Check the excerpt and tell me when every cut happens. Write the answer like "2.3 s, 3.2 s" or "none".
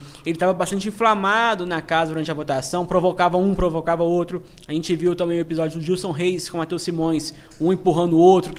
none

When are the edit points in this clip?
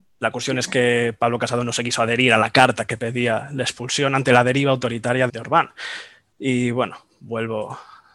5.3 s

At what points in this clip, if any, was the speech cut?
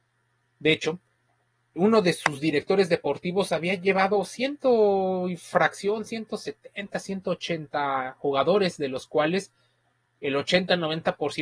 1.8 s

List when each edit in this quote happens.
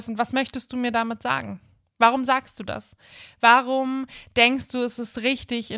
none

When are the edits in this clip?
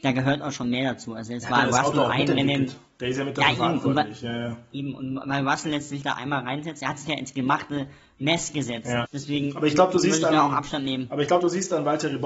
9.0 s

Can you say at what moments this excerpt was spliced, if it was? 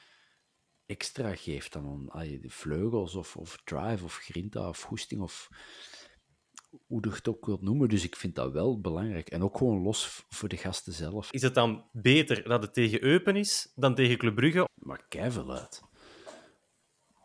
11.3 s, 14.7 s

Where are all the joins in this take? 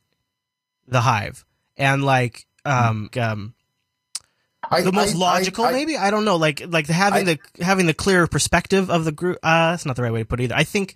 3.1 s

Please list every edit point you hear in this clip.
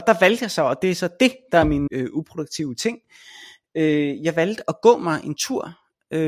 1.9 s

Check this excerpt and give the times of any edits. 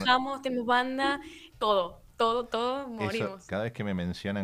1.5 s, 3.5 s

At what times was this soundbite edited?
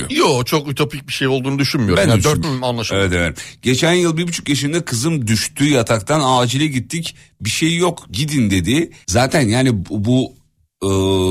2.4 s, 9.0 s

